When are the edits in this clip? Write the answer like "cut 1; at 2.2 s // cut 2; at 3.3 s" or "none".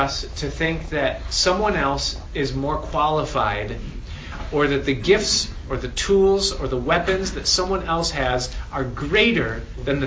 none